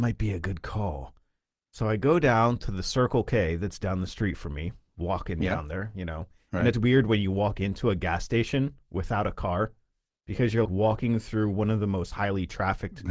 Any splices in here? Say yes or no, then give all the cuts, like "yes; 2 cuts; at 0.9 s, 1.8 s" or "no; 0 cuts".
yes; 2 cuts; at 6.7 s, 10.7 s